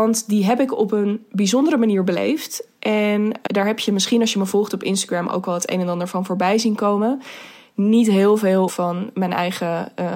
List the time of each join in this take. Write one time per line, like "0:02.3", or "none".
0:03.5
0:08.7